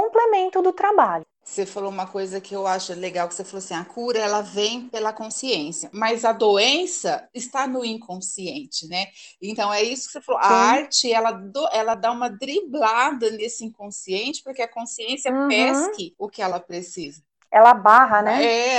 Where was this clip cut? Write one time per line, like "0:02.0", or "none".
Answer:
none